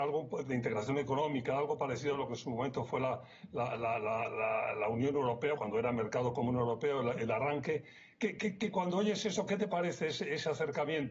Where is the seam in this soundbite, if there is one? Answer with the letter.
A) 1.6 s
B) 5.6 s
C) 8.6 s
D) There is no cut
B